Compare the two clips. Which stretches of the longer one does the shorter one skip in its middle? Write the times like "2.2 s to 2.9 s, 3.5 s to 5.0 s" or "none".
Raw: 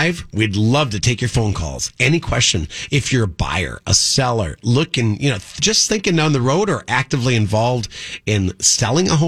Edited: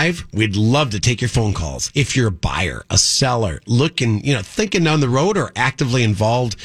1.9 s to 2.9 s, 5.5 s to 5.9 s